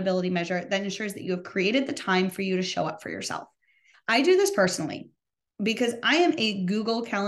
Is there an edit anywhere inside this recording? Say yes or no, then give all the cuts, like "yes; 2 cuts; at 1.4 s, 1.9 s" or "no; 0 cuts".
yes; 1 cut; at 3.9 s